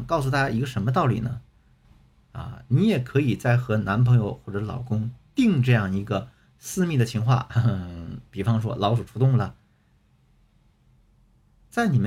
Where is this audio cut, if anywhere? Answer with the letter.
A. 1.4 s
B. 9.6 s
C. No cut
C